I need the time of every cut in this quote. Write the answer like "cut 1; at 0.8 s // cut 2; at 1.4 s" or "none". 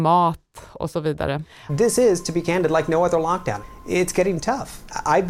cut 1; at 1.7 s